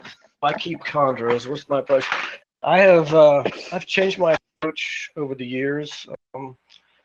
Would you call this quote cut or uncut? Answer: uncut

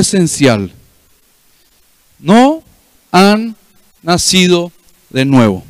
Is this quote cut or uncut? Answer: uncut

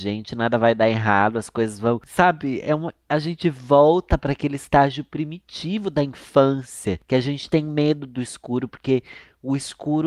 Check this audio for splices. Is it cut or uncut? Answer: uncut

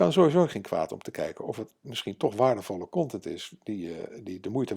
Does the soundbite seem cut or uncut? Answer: uncut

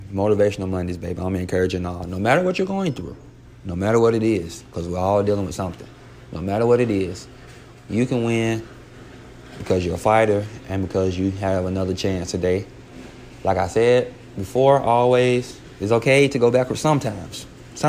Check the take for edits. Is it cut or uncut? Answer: uncut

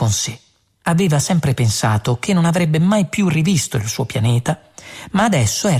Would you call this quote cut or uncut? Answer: uncut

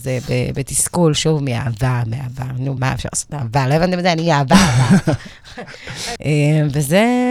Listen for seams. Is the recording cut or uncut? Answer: cut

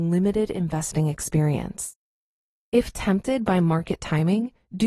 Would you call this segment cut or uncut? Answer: uncut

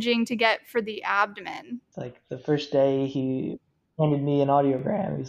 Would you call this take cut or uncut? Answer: cut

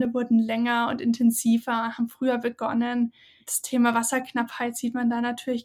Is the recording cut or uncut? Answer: uncut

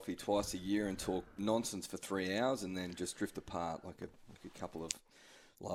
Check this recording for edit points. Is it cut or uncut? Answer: uncut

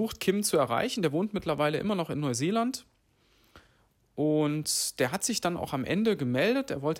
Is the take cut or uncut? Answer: uncut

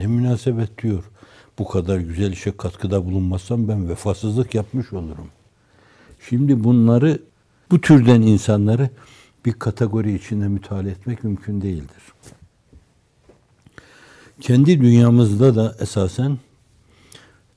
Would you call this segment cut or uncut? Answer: uncut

